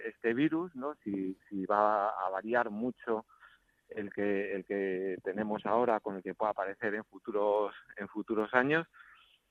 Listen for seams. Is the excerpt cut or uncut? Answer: uncut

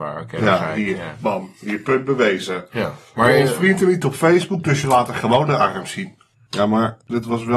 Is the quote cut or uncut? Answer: cut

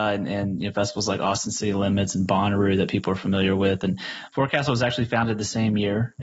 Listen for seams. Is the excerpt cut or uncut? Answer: uncut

